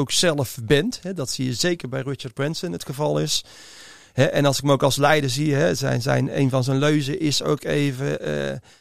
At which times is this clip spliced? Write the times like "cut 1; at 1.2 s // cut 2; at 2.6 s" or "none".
none